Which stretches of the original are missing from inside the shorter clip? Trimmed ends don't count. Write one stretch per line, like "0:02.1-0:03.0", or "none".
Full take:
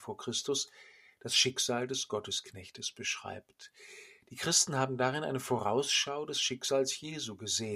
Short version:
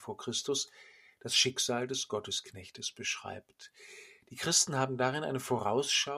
none